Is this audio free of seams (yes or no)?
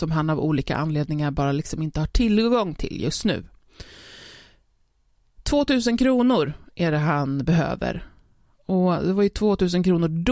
yes